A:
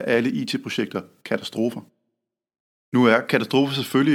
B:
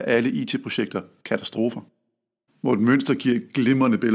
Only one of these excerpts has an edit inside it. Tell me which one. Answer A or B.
B